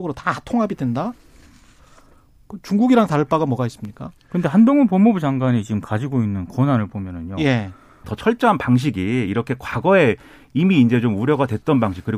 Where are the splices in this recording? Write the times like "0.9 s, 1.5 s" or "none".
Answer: 8.0 s